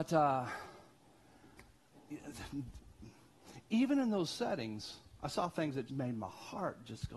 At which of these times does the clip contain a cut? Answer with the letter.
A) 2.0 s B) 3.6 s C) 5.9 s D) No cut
C